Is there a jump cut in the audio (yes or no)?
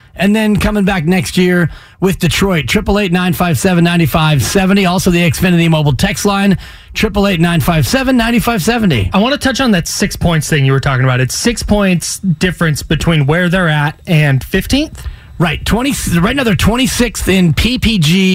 no